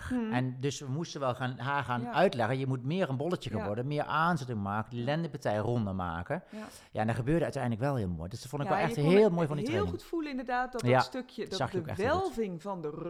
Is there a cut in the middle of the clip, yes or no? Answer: no